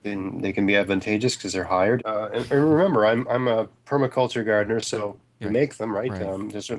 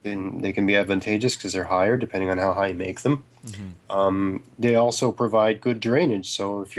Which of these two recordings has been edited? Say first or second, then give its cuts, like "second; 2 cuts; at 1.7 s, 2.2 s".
first; 2 cuts; at 2.0 s, 5.4 s